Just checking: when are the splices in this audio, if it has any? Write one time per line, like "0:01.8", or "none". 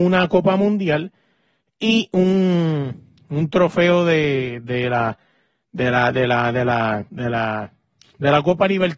0:07.1